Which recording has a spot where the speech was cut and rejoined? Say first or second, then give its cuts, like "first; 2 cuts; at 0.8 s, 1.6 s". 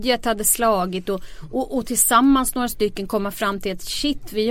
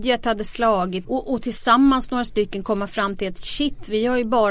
second; 1 cut; at 1.0 s